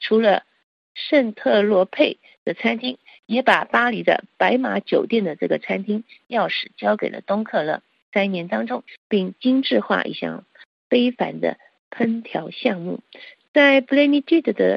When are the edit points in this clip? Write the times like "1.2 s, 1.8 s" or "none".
8.9 s